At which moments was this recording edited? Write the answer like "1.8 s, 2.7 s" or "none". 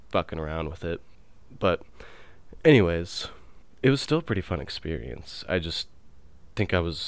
none